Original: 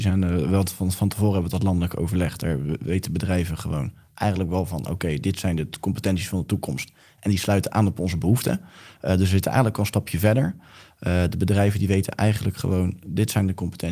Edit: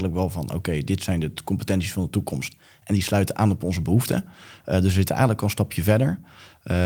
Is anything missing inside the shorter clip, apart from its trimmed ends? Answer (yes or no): no